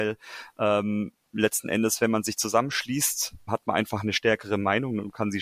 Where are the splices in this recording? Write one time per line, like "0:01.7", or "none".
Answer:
0:03.5